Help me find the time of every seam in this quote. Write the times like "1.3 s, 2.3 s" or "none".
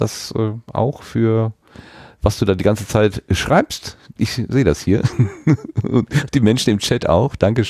none